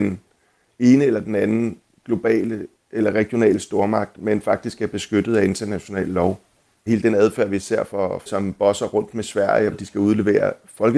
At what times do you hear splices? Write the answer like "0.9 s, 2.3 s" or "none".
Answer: 6.9 s, 8.3 s, 9.7 s